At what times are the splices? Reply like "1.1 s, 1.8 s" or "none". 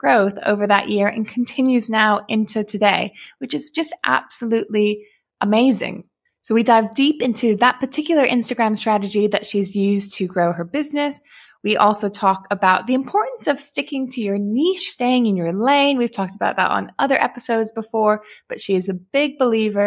none